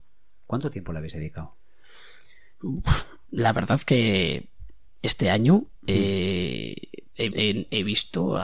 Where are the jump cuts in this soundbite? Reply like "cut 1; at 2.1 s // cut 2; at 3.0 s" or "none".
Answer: cut 1; at 3.2 s // cut 2; at 7.3 s